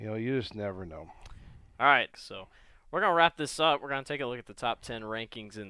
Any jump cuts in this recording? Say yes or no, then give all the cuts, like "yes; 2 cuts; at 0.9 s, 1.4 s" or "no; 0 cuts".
yes; 1 cut; at 2.1 s